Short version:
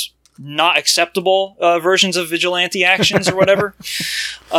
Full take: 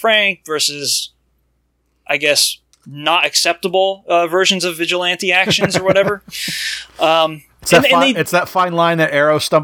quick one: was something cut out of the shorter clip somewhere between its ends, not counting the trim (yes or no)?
no